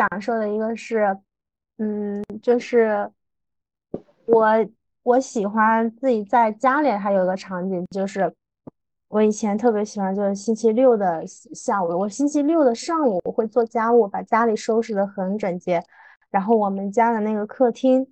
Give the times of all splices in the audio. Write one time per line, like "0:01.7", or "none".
none

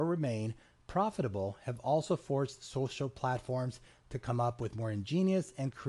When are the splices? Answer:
none

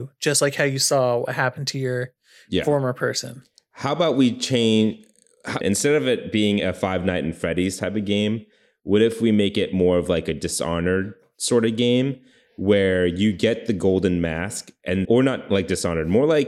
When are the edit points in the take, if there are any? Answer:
0:05.6
0:15.1

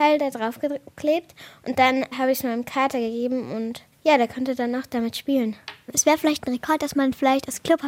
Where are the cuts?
none

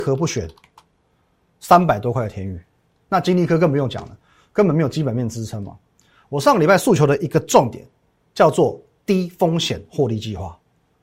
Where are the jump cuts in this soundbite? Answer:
none

